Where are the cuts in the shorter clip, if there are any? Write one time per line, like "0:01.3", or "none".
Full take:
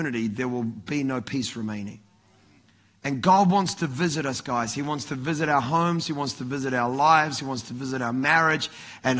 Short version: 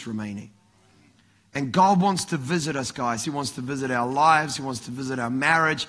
0:03.2